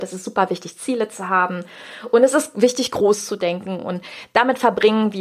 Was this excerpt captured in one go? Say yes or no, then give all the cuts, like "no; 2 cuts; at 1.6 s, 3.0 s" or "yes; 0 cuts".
yes; 0 cuts